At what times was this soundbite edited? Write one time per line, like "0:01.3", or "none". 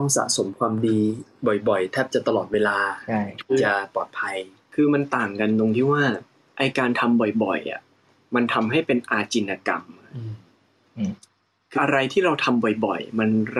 0:11.7

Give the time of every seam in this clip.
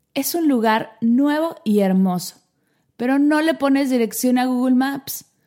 none

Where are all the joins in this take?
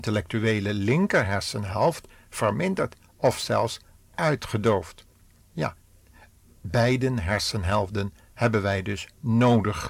0:05.4

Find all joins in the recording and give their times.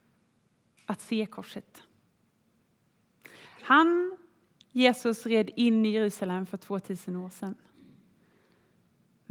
none

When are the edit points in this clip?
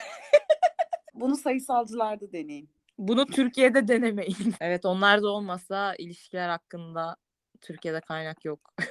0:01.1
0:04.6

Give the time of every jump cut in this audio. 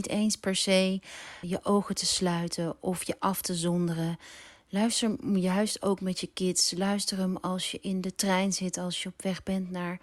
0:01.4

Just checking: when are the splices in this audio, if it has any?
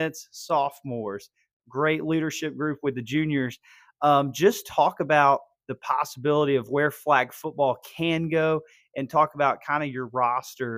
none

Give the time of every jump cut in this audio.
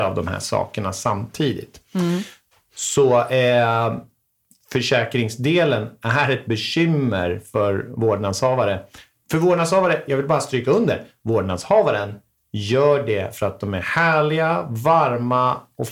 none

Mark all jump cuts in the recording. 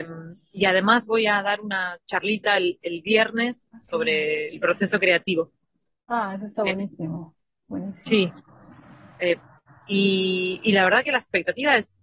none

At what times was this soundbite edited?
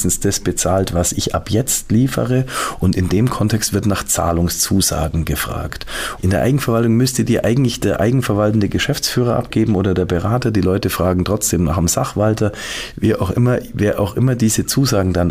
0:06.2

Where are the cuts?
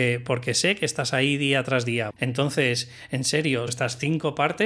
0:02.1
0:03.7

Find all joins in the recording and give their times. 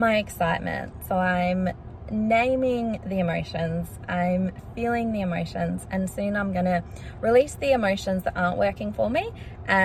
none

